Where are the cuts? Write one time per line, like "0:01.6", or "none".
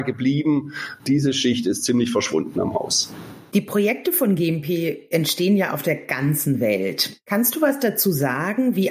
0:01.0